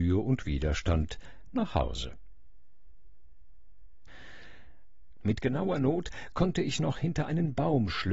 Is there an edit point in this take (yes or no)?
yes